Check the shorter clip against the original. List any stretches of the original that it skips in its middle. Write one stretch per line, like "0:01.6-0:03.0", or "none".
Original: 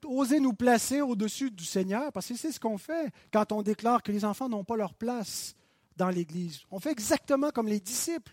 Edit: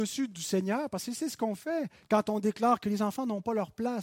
none